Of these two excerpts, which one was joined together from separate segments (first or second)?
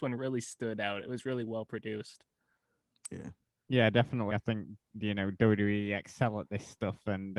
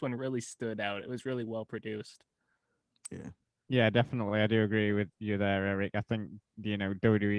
first